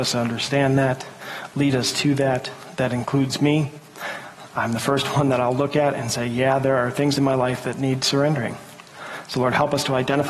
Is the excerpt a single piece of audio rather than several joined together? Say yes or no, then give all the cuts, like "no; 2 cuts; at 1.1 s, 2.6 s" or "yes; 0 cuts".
yes; 0 cuts